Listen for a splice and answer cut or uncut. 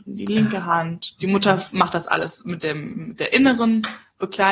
uncut